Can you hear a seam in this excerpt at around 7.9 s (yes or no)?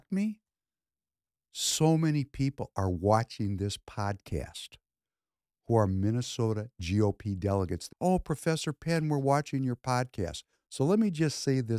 yes